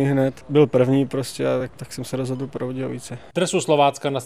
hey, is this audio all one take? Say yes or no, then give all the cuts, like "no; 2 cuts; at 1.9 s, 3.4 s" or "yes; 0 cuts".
yes; 0 cuts